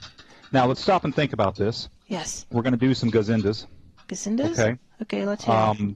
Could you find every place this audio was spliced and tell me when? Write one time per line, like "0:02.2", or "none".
0:02.0

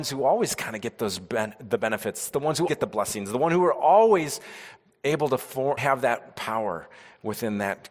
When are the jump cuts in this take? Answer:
0:02.7
0:05.8

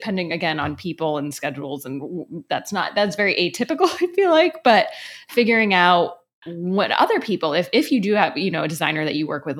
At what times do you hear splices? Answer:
none

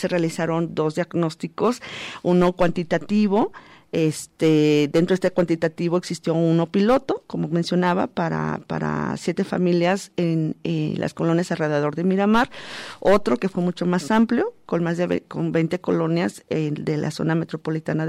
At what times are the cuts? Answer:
none

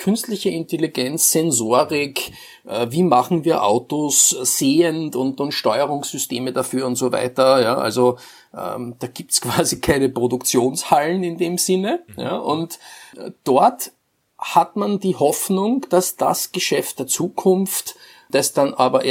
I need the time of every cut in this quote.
none

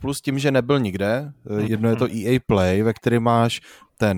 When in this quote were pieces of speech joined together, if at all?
0:01.7

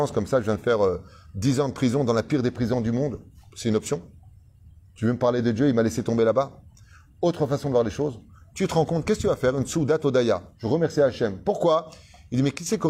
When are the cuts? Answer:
none

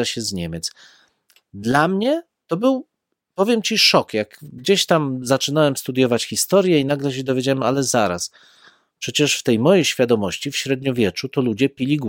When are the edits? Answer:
none

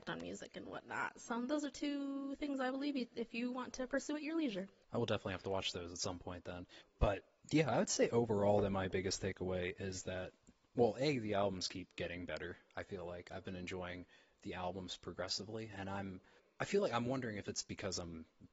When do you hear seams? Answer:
none

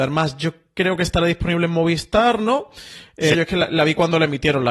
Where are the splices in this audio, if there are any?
0:03.3

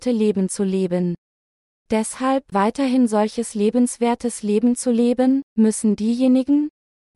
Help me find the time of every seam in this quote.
0:02.5
0:05.5

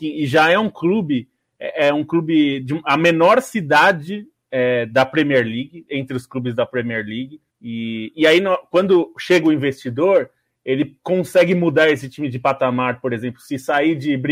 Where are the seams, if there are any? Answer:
0:07.5

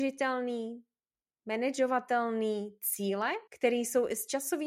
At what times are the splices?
0:03.5

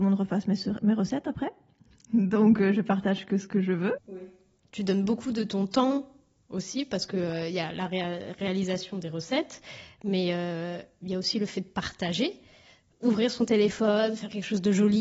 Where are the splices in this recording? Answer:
0:04.0

